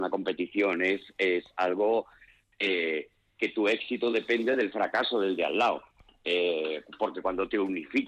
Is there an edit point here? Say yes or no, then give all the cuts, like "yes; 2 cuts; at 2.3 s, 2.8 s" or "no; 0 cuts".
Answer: no; 0 cuts